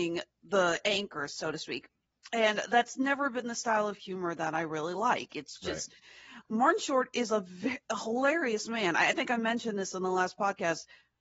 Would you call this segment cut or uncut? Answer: uncut